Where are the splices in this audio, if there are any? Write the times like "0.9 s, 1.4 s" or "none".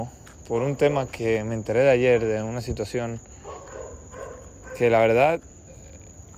1.1 s